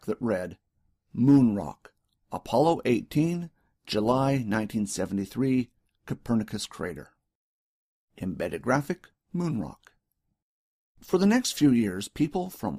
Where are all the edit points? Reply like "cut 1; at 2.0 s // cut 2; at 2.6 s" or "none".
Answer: none